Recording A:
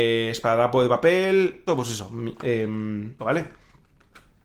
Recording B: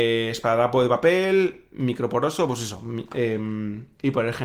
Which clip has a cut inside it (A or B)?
A